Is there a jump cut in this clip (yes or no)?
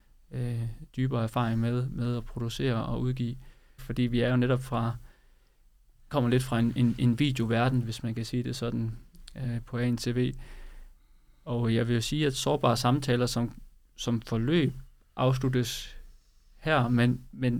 yes